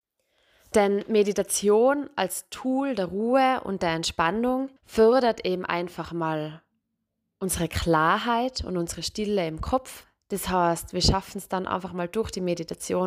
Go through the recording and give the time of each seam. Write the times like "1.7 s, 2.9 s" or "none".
4.8 s